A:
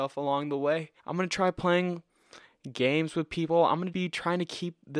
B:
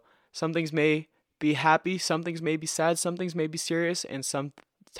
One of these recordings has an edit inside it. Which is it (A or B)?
A